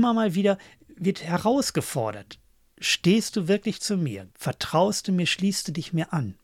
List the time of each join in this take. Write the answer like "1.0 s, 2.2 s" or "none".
4.3 s